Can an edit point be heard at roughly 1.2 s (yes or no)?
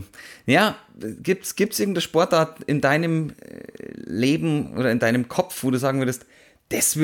no